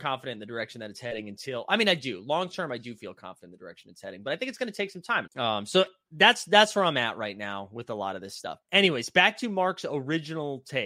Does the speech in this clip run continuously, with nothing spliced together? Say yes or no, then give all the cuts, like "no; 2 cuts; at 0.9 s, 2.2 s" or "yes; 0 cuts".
no; 2 cuts; at 5.3 s, 8.6 s